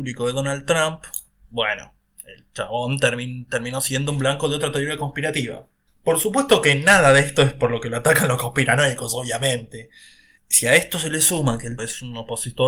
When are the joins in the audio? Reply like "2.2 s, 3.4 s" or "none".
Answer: 5.9 s, 10.4 s, 11.8 s